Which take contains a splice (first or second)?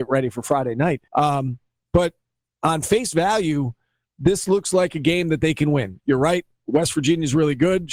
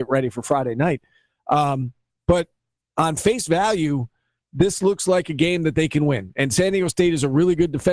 first